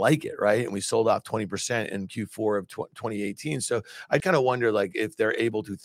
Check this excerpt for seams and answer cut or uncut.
cut